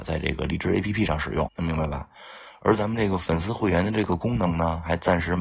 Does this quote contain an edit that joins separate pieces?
yes; 1 cut; at 1.5 s

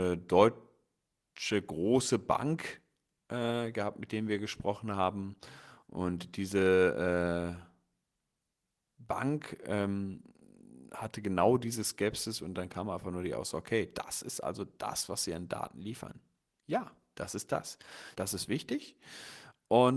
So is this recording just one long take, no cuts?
no; 1 cut; at 18.1 s

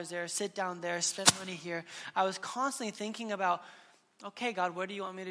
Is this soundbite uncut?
yes; 0 cuts

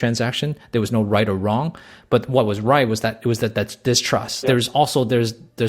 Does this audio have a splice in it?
yes; 1 cut; at 4.4 s

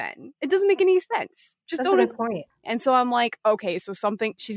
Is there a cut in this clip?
yes; 1 cut; at 2.6 s

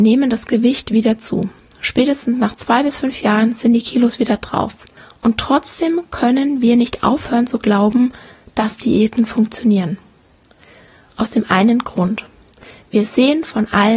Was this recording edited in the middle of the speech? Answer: no; 0 cuts

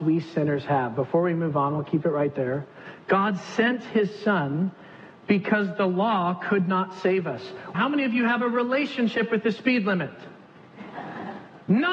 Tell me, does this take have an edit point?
yes; 1 cut; at 7.7 s

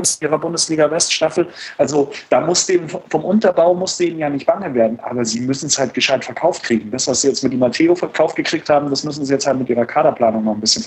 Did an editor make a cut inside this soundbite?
no; 0 cuts

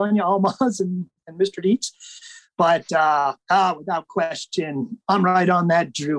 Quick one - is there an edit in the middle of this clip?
no; 0 cuts

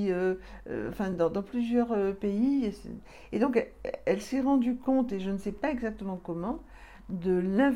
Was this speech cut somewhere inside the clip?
no; 0 cuts

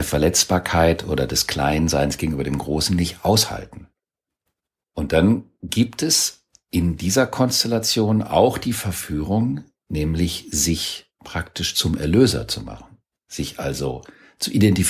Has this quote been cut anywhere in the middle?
no; 0 cuts

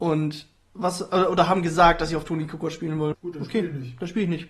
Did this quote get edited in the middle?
yes; 1 cut; at 3.1 s

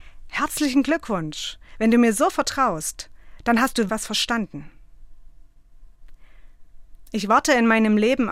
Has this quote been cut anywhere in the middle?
yes; 2 cuts; at 3.9 s, 7.1 s

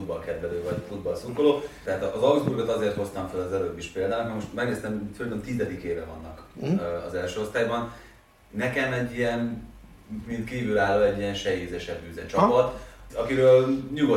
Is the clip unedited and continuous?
no; 2 cuts; at 1.8 s, 13.1 s

